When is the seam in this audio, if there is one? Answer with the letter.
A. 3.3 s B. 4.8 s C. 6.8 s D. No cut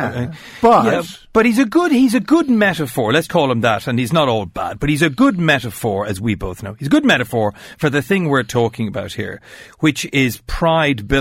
A